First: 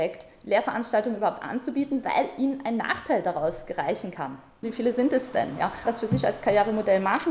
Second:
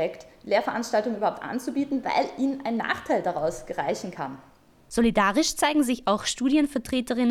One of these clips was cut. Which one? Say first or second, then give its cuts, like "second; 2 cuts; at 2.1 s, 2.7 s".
first; 2 cuts; at 4.6 s, 5.9 s